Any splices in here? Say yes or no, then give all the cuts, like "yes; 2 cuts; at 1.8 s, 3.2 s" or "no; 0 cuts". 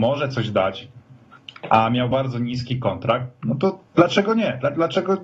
yes; 2 cuts; at 2.1 s, 3.9 s